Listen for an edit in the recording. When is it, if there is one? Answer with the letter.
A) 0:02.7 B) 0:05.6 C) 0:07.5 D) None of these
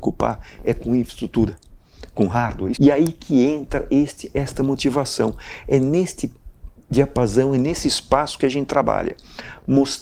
A